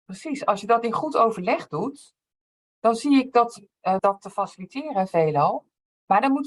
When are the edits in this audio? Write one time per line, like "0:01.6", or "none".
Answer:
0:04.0